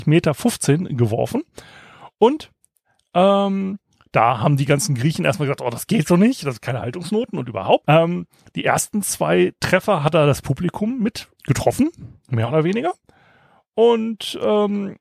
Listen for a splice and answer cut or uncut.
cut